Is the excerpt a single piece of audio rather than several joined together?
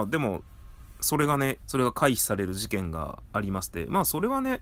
no; 1 cut; at 1.6 s

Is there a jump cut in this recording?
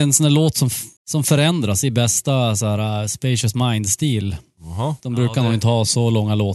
yes; 2 cuts; at 1.0 s, 5.0 s

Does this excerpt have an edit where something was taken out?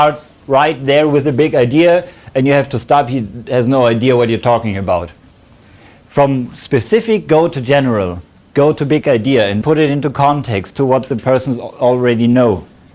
yes; 1 cut; at 9.6 s

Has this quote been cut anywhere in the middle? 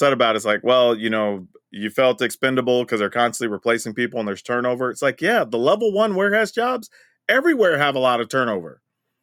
no; 0 cuts

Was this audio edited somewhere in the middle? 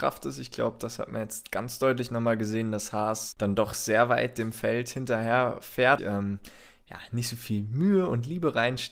yes; 1 cut; at 6.0 s

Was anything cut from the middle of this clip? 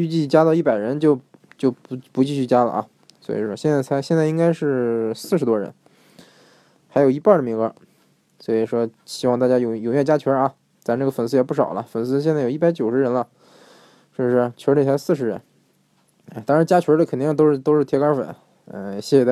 no; 0 cuts

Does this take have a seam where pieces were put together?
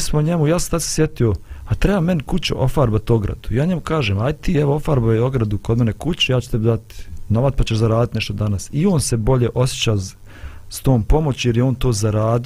no; 0 cuts

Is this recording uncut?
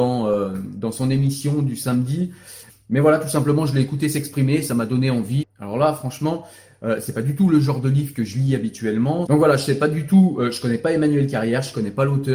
no; 3 cuts; at 2.7 s, 5.4 s, 9.3 s

